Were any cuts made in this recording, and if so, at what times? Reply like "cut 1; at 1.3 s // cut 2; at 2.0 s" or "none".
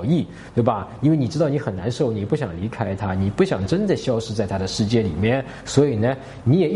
none